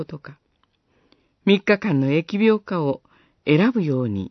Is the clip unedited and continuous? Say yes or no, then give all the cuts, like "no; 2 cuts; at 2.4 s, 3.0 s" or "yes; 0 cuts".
yes; 0 cuts